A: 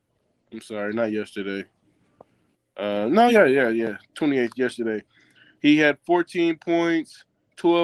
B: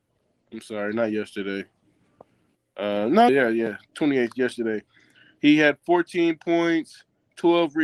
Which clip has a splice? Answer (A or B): B